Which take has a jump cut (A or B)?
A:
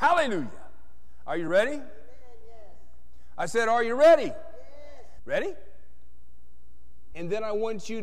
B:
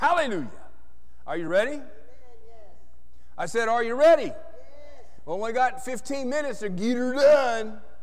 A